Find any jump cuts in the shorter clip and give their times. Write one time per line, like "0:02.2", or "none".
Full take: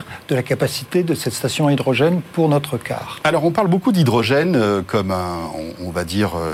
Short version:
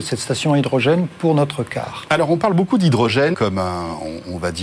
0:03.3